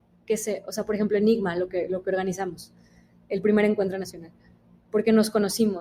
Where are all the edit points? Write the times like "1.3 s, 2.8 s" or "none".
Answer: none